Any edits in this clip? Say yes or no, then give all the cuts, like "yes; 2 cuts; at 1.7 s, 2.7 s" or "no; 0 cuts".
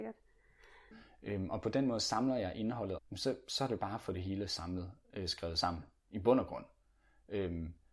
yes; 2 cuts; at 0.9 s, 3.0 s